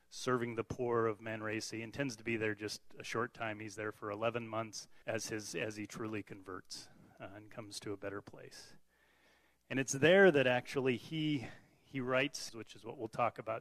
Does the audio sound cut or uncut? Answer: cut